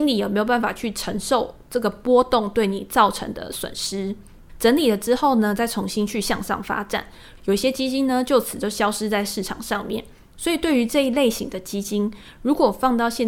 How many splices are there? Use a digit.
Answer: 2